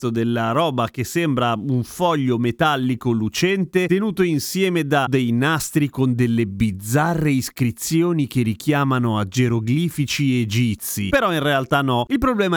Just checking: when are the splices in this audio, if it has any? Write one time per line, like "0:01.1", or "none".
0:11.1